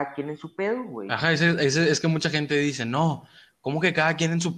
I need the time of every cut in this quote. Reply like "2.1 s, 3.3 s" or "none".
none